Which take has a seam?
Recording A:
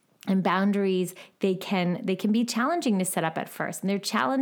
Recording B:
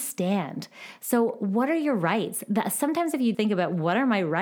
B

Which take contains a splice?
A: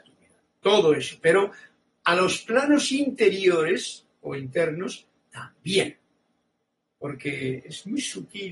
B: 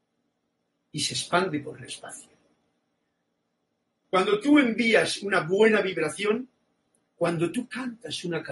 B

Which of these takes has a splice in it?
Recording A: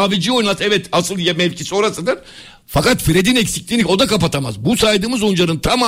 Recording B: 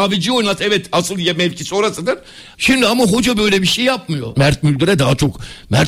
B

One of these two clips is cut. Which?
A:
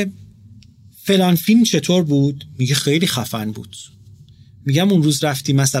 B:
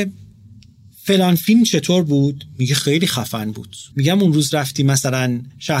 B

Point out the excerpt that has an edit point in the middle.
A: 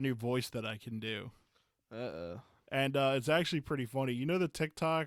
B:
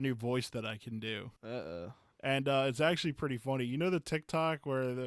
B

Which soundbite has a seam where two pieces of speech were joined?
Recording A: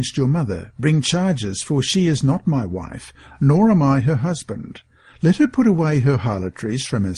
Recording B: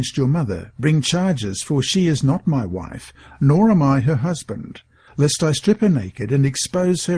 B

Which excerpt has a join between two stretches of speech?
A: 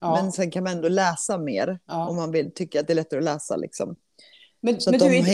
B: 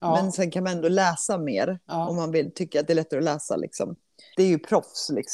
B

